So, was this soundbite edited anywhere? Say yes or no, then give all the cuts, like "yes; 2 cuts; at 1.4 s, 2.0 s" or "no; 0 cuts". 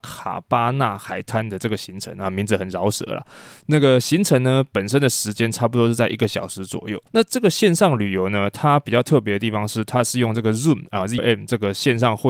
yes; 2 cuts; at 7.1 s, 11.2 s